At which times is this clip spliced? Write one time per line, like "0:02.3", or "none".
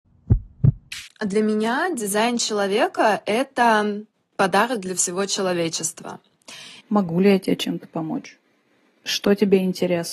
0:01.1
0:06.8